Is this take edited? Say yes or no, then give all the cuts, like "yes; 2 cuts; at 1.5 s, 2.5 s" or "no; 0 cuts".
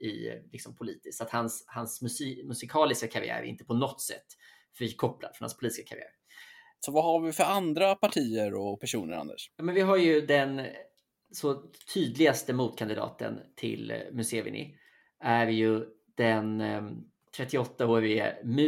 yes; 1 cut; at 6.8 s